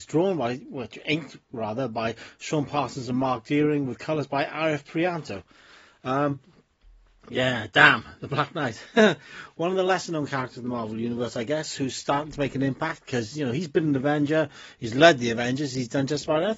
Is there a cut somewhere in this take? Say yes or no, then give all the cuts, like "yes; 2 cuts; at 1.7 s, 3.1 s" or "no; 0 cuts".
no; 0 cuts